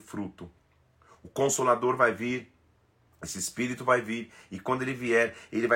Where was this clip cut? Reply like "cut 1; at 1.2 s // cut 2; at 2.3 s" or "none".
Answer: none